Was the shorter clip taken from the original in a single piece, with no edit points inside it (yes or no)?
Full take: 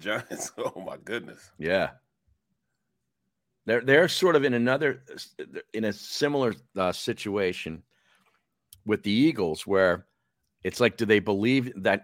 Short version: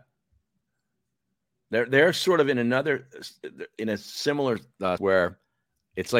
no